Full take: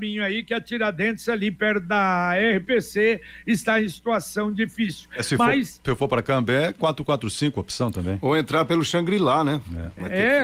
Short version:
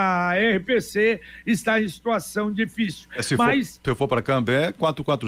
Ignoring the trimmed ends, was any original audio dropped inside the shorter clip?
no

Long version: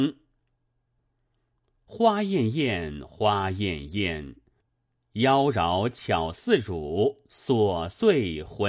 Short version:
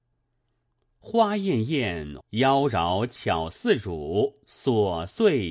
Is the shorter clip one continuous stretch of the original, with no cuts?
no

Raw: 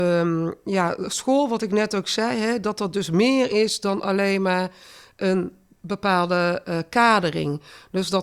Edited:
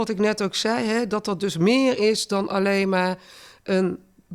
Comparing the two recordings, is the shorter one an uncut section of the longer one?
yes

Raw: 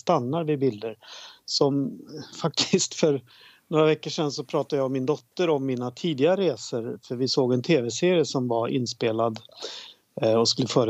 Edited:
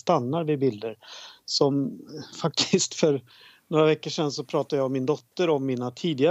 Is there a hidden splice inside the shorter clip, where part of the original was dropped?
no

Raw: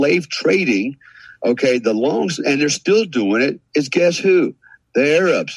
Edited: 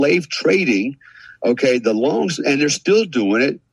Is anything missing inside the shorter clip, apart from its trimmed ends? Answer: no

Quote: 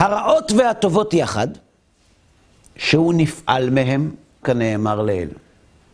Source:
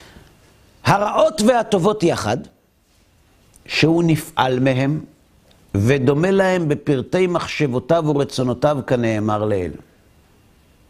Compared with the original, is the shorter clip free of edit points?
no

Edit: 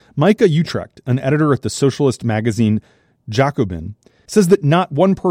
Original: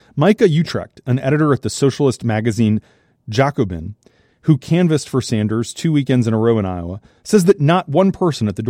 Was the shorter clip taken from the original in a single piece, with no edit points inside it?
no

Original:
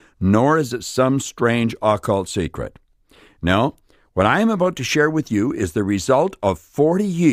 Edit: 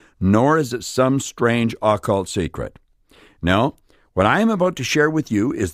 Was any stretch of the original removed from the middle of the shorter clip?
no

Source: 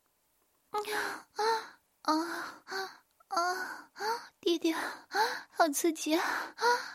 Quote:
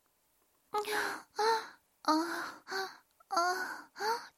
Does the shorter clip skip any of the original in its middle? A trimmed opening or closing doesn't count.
no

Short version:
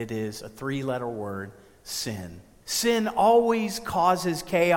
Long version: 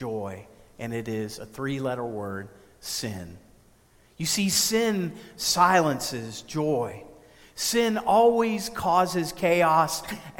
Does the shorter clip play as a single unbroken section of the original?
no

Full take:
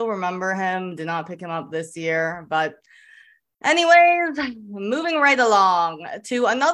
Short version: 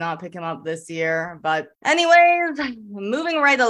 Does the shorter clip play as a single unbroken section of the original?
no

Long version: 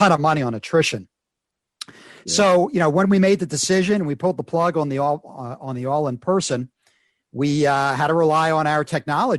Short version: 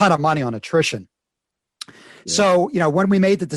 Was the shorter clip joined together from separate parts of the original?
no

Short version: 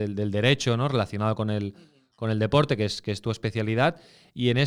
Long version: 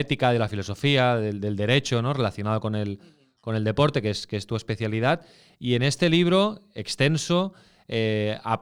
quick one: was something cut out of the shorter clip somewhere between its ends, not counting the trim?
no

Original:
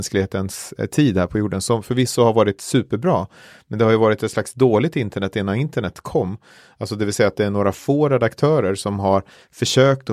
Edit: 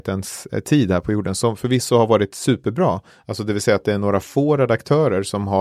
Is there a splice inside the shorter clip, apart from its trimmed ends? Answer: yes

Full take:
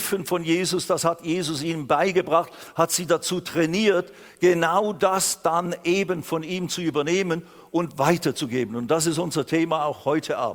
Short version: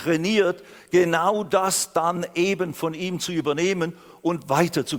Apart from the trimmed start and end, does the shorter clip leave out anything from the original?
no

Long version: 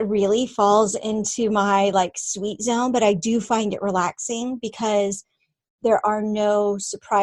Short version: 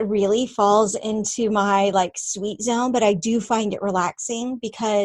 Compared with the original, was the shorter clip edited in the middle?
no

